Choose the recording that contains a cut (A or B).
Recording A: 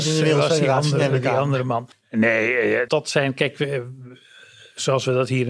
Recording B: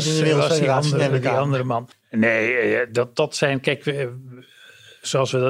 A